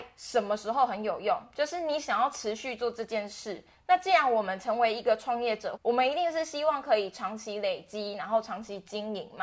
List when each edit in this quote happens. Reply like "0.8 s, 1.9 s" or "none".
5.8 s